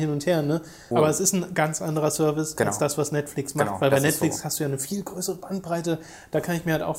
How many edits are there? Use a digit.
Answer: 1